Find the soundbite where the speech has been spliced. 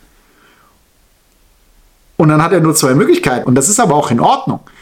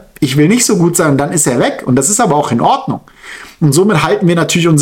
first; 1 cut; at 3.4 s

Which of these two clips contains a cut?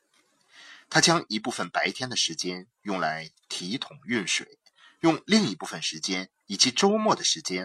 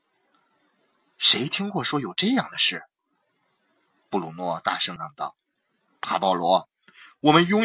second; 1 cut; at 5.0 s

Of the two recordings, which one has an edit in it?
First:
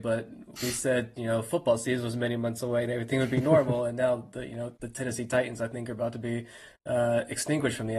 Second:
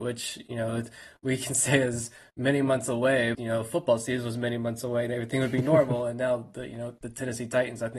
second; 1 cut; at 3.3 s

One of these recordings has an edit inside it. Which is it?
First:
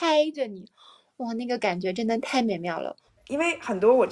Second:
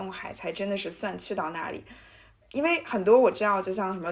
first; 1 cut; at 3.1 s

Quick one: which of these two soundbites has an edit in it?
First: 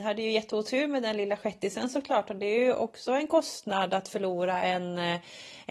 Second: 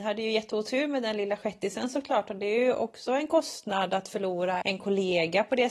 second; 1 cut; at 4.6 s

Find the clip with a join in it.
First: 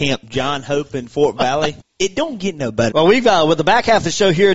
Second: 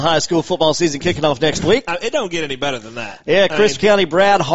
first; 2 cuts; at 1.8 s, 2.9 s

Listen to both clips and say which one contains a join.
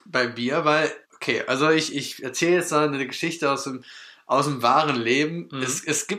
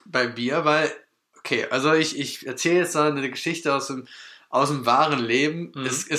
first; 1 cut; at 1.0 s

